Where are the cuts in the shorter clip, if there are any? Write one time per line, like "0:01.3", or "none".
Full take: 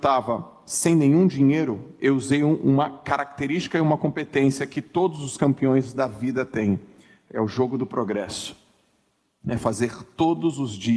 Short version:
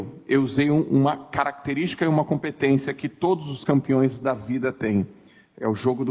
none

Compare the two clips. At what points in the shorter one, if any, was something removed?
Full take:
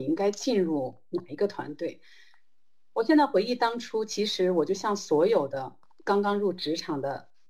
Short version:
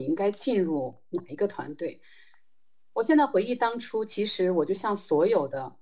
none

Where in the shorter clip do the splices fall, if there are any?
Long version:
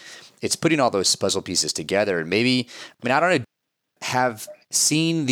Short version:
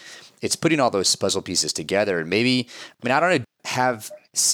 0:03.5

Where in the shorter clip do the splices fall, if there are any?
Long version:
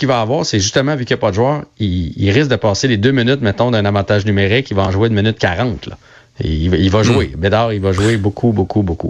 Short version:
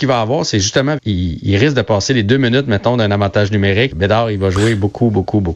0:01.0
0:03.9

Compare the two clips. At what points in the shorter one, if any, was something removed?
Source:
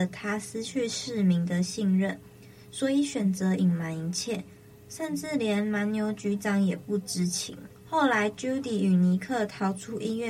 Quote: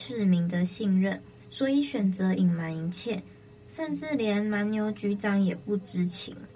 0:01.4

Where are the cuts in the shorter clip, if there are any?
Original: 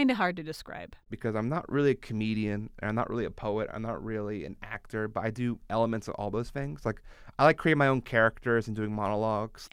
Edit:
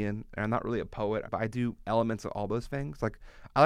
0:01.3

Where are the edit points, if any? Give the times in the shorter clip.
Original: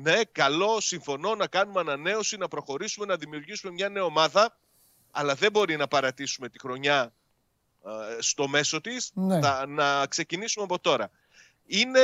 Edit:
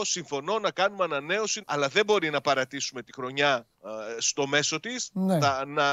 0:01.6
0:03.7

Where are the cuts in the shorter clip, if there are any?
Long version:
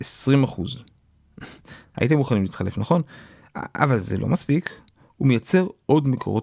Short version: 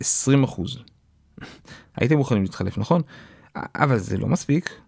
none

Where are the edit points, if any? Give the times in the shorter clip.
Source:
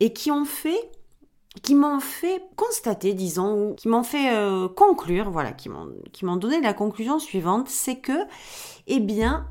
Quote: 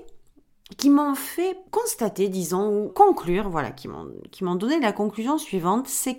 0:02.9

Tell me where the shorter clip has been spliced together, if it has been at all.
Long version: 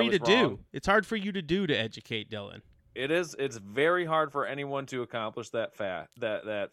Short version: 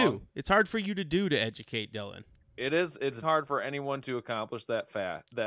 0:03.2

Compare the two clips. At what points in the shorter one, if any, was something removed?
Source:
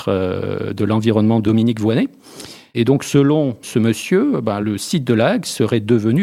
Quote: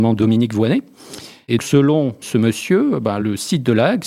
0:01.6

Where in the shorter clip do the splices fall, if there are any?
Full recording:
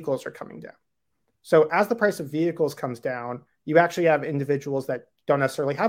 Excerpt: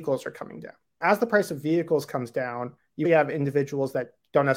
0:01.0
0:03.0

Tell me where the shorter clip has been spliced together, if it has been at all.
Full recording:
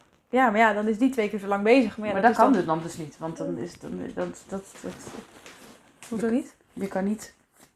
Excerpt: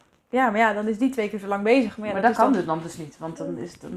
none

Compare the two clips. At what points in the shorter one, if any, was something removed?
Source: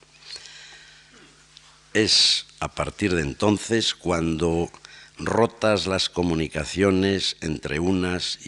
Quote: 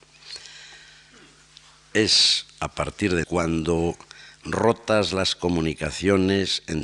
0:03.2

